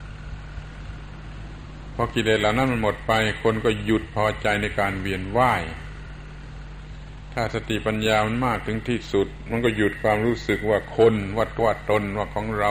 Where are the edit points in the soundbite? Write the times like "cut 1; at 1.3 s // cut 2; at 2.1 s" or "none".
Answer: cut 1; at 11.6 s